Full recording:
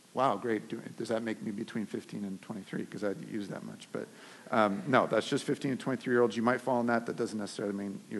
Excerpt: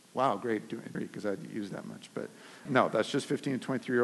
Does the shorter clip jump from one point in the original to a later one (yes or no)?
yes